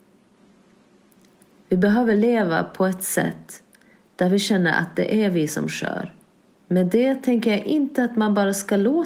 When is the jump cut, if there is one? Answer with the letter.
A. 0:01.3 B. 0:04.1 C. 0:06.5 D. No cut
C